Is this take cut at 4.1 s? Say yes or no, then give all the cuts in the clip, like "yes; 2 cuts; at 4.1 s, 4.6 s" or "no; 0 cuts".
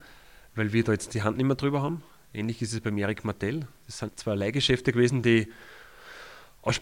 yes; 1 cut; at 4.1 s